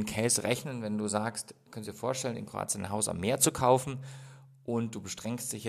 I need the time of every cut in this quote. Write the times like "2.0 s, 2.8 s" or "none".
1.7 s